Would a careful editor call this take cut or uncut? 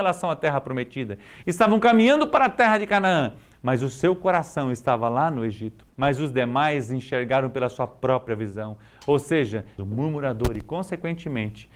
cut